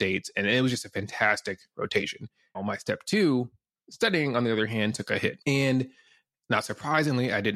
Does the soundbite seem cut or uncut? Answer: cut